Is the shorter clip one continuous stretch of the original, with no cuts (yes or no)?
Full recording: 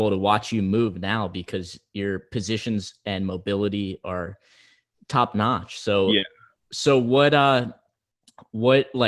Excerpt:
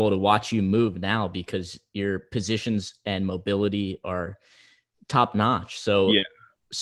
yes